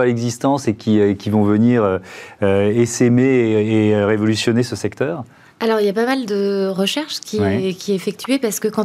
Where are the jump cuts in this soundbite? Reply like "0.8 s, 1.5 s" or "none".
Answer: none